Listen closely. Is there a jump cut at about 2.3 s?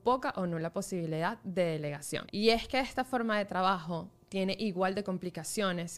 yes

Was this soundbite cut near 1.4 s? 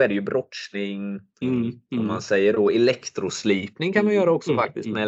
yes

